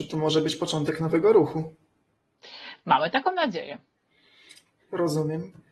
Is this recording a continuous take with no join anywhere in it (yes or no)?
yes